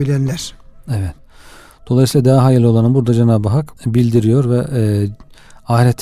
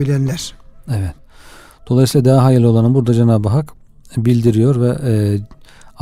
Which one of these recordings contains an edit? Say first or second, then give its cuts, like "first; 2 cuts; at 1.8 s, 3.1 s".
first; 1 cut; at 3.8 s